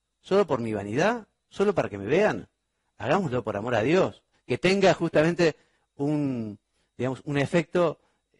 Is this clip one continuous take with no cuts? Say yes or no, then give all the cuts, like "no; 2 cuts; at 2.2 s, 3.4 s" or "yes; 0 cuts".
no; 1 cut; at 4.3 s